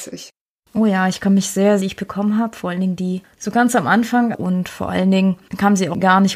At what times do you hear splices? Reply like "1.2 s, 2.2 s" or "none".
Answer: 1.8 s, 4.3 s